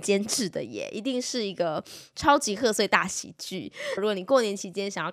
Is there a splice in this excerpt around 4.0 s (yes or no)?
yes